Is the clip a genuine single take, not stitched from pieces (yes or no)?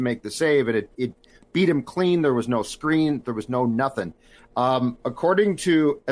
yes